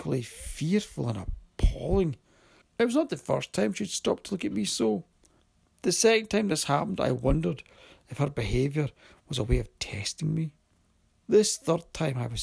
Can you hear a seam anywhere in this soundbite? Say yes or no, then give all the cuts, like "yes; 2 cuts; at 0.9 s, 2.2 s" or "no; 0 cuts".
yes; 1 cut; at 2.6 s